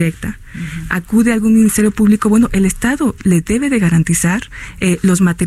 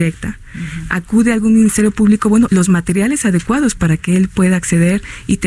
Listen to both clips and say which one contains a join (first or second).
second